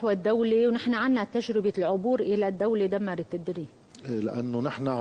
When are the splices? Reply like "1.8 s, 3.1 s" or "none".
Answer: none